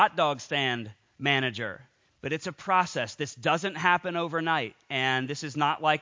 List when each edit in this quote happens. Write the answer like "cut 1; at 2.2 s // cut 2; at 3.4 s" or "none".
cut 1; at 2.0 s